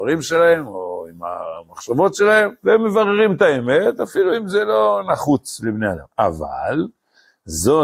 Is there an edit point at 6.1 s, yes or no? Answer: no